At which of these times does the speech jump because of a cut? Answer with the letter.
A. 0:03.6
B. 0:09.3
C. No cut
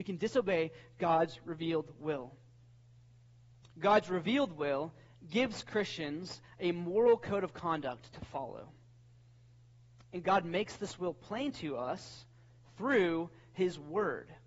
A